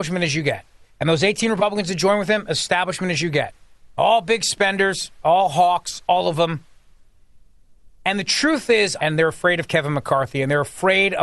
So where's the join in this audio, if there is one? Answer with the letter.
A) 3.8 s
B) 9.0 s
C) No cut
B